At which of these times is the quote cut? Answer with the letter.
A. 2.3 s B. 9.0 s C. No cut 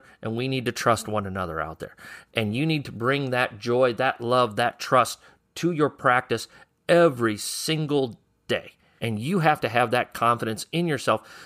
B